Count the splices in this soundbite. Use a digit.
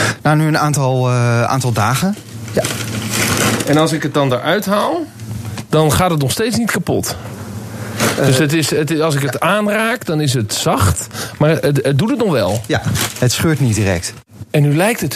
0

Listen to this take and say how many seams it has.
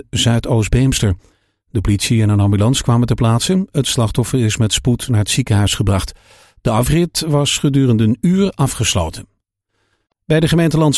0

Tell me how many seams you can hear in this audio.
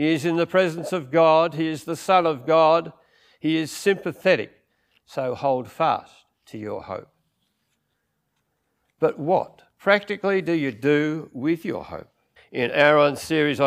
1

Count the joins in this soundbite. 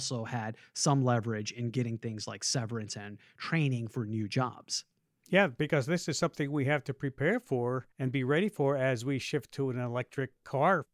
1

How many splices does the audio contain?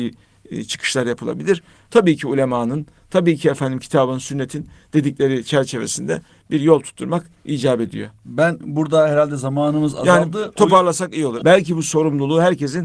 2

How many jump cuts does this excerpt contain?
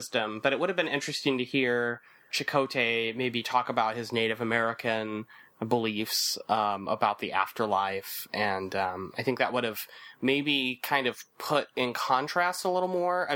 1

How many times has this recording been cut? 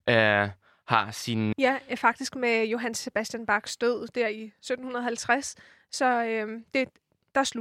1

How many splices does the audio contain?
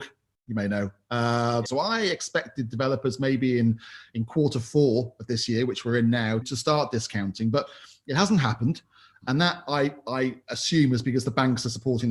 2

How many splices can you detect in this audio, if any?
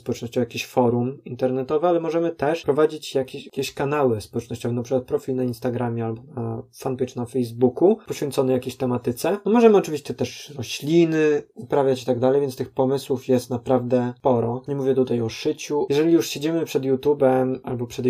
0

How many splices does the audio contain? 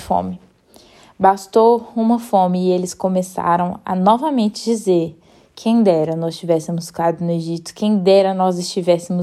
0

